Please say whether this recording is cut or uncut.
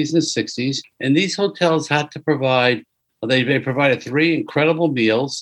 uncut